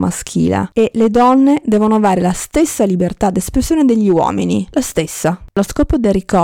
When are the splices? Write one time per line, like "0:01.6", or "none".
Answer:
0:05.5